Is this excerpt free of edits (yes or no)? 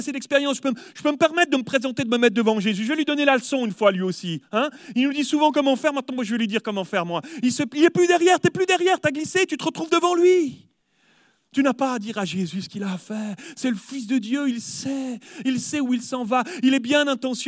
yes